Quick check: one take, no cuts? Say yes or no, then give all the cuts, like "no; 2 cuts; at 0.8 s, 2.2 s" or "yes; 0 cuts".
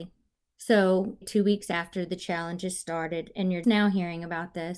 no; 2 cuts; at 1.2 s, 3.6 s